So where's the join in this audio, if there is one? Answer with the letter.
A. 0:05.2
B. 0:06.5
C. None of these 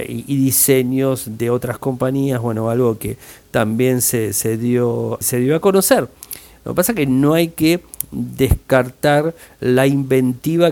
A